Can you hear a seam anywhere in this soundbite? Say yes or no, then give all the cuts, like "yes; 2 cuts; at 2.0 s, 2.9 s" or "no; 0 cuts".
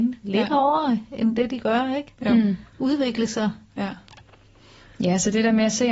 no; 0 cuts